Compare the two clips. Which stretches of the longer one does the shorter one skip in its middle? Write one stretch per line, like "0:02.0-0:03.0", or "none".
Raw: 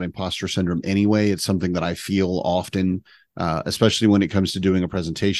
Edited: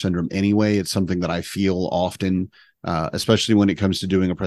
none